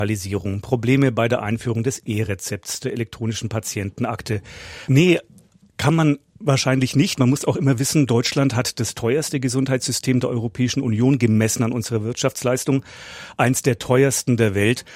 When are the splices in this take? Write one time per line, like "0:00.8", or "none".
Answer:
0:04.9